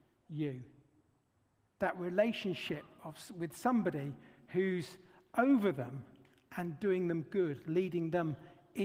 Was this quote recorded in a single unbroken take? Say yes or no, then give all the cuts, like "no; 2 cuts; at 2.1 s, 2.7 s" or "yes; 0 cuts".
yes; 0 cuts